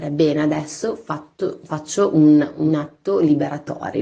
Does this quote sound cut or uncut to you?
uncut